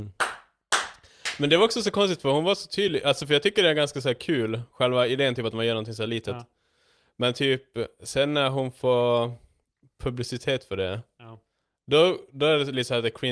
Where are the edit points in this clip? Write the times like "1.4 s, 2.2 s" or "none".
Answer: none